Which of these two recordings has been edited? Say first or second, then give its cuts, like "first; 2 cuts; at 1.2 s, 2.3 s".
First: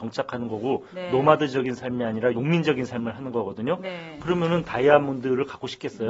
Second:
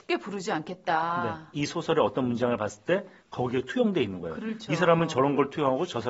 second; 1 cut; at 1.5 s